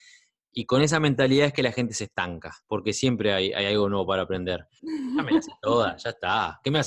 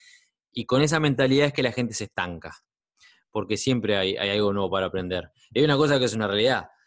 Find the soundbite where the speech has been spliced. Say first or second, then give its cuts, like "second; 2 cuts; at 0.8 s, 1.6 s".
first; 2 cuts; at 2.6 s, 4.8 s